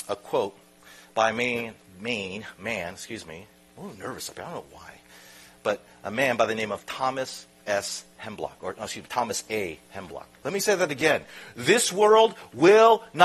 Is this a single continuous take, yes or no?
no